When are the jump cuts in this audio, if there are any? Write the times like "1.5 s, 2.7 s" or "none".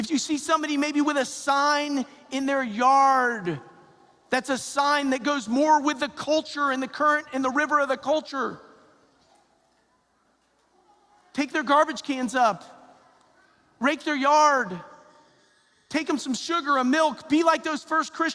none